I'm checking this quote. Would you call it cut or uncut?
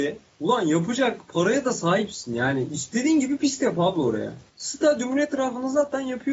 cut